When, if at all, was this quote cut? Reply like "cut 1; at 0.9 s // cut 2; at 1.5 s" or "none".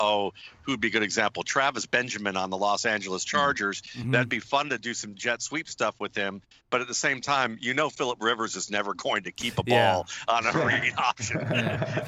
none